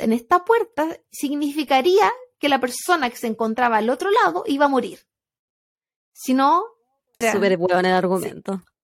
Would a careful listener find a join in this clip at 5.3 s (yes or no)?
no